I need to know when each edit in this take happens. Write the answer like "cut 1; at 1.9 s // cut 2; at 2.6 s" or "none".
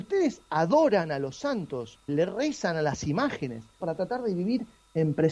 cut 1; at 2.1 s // cut 2; at 3.8 s